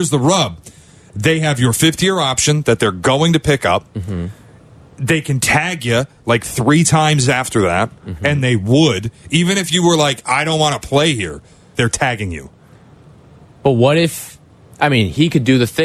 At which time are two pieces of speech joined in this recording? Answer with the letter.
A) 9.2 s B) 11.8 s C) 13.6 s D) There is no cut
B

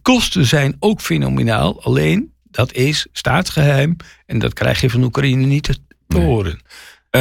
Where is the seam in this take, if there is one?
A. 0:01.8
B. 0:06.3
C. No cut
C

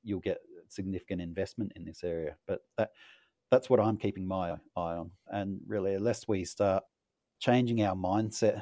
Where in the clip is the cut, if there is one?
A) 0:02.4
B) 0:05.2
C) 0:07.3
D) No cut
B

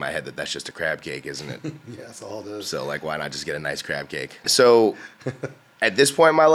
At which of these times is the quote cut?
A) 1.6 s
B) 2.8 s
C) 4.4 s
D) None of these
C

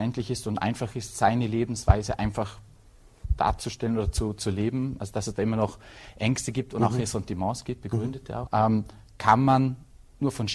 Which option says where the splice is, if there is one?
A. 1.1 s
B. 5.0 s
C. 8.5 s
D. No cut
C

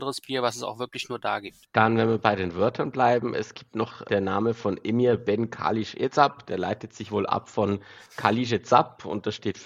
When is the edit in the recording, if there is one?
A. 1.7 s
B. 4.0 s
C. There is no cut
B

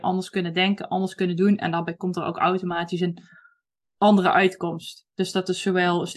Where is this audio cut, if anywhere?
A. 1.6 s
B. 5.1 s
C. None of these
C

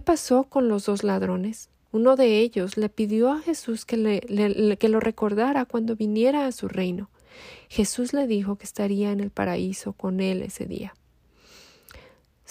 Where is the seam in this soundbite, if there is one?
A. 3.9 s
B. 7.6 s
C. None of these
C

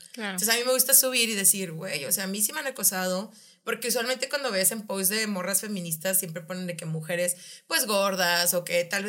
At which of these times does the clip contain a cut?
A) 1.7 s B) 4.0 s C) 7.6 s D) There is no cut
D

